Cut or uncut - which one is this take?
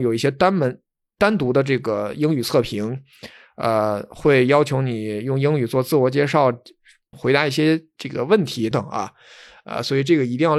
cut